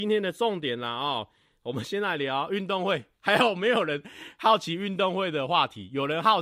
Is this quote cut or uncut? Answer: uncut